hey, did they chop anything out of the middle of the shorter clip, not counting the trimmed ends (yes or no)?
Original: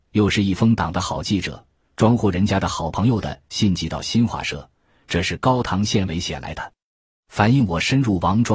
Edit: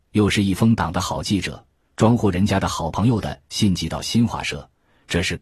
no